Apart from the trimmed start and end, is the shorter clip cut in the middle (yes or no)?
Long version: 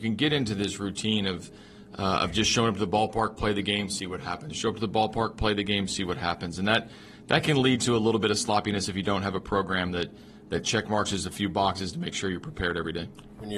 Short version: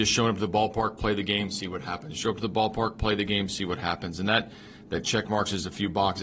yes